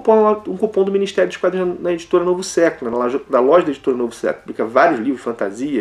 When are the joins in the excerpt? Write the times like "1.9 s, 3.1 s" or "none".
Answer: none